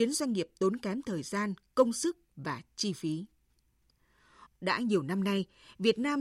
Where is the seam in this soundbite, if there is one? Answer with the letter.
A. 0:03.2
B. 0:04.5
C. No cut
B